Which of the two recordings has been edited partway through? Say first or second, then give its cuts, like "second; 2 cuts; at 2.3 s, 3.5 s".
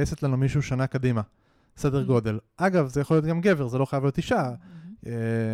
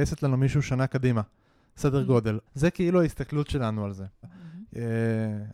second; 2 cuts; at 2.5 s, 4.2 s